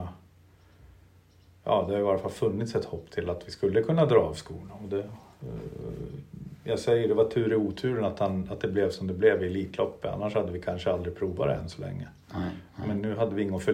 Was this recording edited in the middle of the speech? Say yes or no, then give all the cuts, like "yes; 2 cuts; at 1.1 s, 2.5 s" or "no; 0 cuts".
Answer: no; 0 cuts